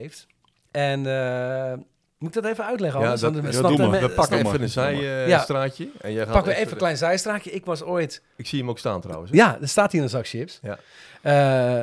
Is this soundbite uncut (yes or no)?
yes